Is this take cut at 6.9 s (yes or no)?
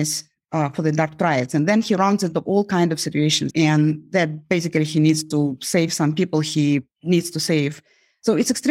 yes